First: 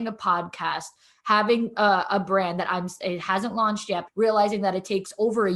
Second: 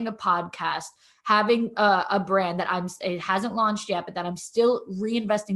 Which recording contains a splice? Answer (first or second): first